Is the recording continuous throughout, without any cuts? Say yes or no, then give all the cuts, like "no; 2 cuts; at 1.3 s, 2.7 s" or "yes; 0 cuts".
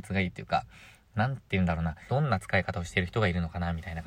no; 1 cut; at 2.1 s